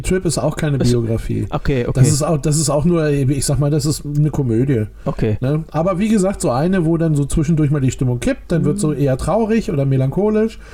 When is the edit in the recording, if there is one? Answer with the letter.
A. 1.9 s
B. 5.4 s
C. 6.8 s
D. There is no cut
D